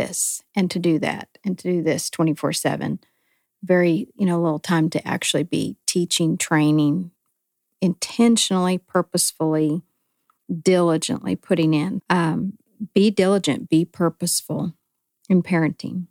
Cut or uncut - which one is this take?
cut